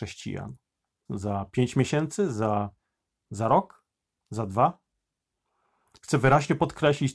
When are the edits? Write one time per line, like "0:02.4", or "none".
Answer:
0:01.1